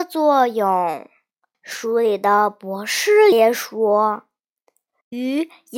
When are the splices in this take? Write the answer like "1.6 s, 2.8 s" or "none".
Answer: 1.5 s, 3.3 s